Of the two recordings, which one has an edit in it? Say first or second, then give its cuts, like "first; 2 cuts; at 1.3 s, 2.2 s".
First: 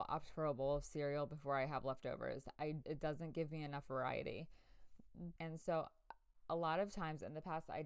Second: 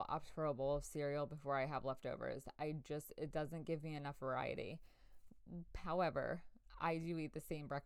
first; 2 cuts; at 2.8 s, 5.4 s